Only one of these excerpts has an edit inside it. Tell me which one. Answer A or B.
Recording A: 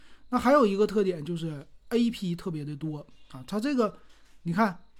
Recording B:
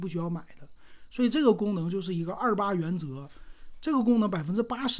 A